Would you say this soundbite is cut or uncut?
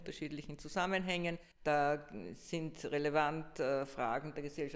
cut